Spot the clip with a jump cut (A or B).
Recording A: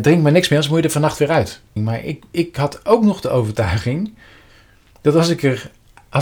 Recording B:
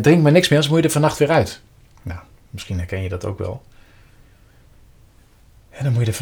A